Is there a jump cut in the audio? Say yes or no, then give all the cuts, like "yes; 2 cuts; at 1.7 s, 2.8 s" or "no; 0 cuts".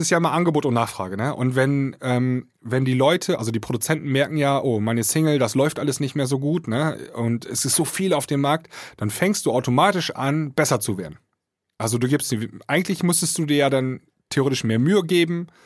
no; 0 cuts